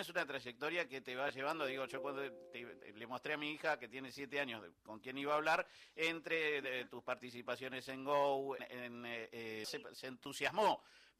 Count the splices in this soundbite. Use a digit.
2